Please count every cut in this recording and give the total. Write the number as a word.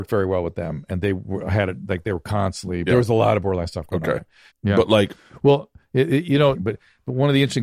three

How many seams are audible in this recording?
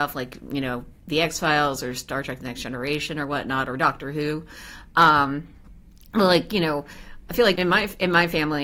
two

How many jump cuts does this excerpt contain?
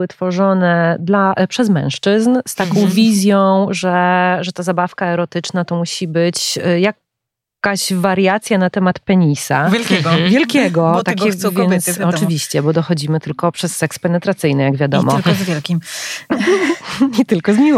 zero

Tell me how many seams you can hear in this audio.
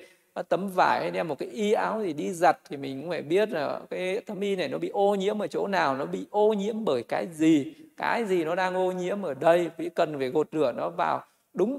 zero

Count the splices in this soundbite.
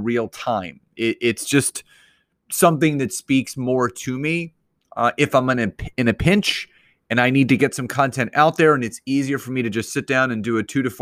zero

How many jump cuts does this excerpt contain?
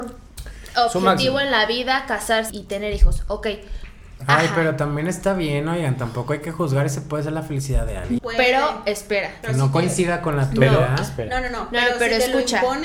three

